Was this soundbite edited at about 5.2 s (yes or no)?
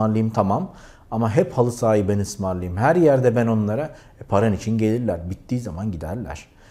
no